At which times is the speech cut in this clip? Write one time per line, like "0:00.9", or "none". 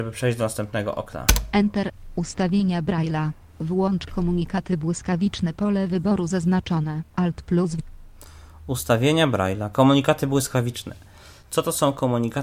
none